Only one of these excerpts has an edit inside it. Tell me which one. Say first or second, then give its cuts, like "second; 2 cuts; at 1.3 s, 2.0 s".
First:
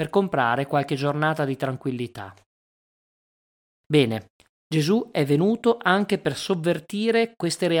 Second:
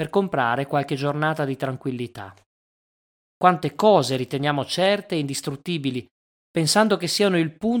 second; 1 cut; at 3.2 s